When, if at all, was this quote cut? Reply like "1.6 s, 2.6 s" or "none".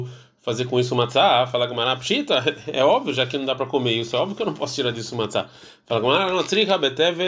none